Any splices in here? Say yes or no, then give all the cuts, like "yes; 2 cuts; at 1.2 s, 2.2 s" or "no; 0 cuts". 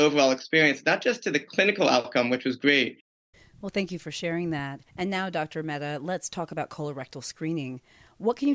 yes; 1 cut; at 4.9 s